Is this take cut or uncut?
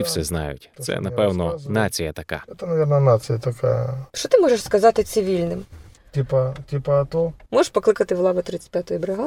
cut